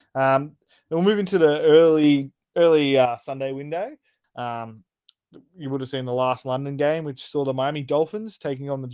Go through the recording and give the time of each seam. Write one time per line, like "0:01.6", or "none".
0:04.2